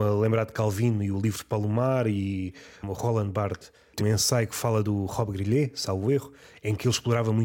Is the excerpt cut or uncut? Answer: cut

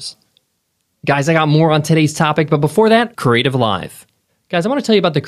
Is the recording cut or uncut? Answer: cut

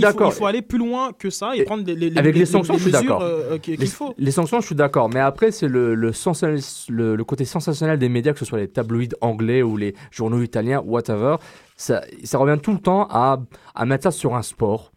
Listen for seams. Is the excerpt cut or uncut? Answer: uncut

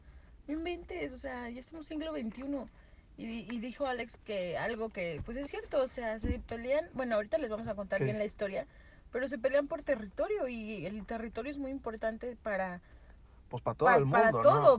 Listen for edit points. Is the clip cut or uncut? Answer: cut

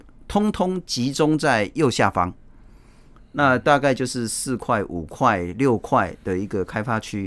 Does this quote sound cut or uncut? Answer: uncut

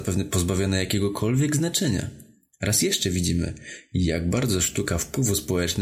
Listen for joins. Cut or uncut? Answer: uncut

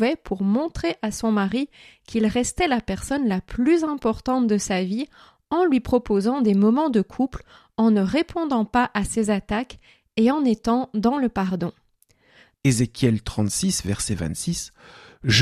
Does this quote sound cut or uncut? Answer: cut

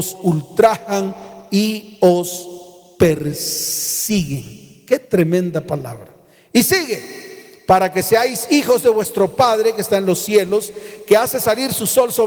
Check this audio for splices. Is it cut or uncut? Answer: uncut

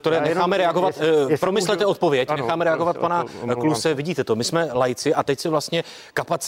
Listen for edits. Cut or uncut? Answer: uncut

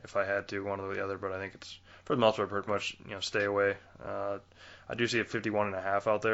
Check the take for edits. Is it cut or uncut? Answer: cut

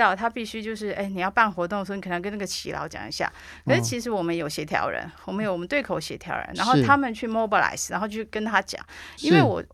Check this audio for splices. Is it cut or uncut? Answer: uncut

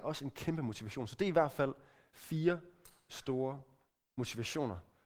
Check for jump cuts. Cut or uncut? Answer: uncut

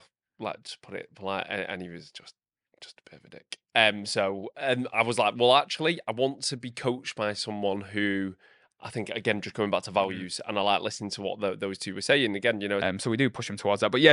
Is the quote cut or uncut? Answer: cut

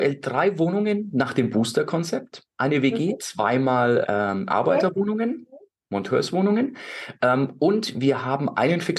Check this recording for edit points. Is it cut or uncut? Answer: cut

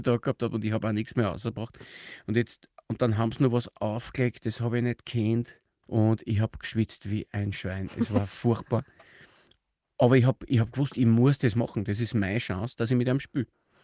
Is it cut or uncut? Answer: cut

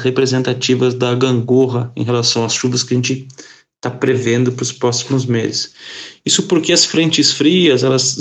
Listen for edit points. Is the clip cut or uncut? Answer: uncut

